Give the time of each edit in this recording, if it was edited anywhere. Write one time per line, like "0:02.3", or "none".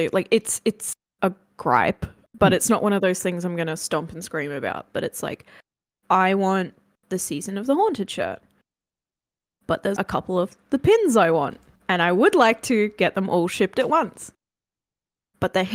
0:10.0
0:11.8